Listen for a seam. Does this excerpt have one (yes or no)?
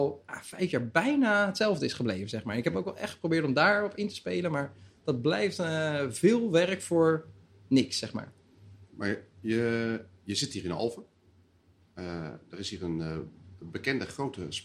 no